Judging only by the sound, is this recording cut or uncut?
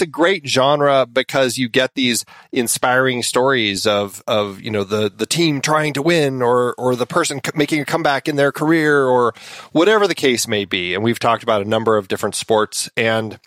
uncut